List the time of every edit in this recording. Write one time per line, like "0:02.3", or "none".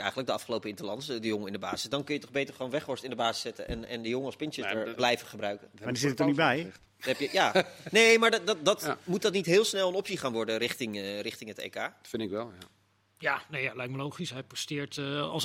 0:04.9